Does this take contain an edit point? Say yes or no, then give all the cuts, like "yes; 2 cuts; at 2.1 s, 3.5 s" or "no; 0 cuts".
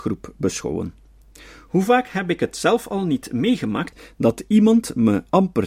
no; 0 cuts